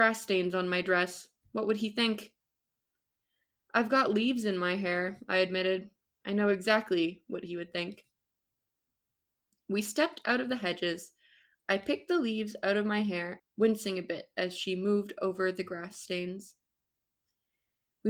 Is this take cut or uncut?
cut